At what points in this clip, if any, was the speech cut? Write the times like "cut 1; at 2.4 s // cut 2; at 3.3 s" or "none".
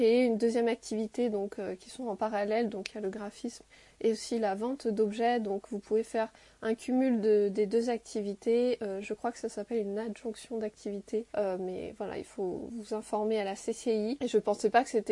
cut 1; at 11.3 s